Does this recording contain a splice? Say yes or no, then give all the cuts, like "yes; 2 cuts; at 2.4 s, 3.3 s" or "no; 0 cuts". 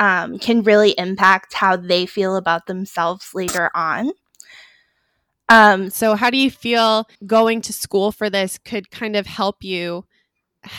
yes; 2 cuts; at 5.9 s, 7.2 s